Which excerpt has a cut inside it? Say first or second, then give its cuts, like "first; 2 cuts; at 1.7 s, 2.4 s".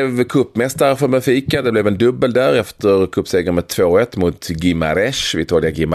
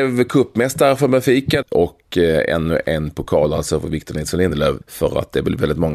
second; 2 cuts; at 1.6 s, 4.8 s